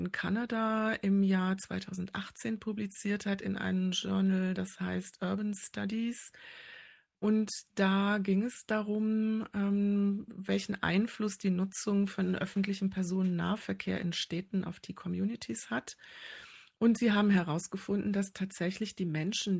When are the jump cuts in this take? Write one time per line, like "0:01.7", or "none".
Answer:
none